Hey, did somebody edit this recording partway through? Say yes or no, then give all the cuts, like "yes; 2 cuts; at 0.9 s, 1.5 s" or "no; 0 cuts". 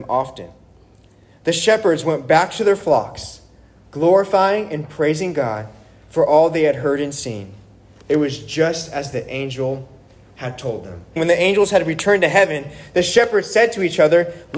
yes; 1 cut; at 11.2 s